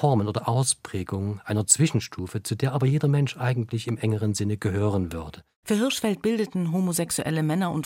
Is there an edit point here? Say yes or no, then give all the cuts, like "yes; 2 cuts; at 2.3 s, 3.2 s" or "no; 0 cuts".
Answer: yes; 1 cut; at 5.6 s